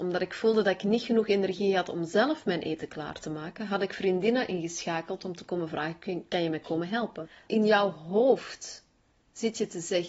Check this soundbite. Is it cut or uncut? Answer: cut